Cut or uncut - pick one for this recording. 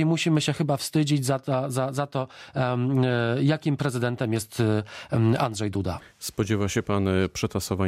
uncut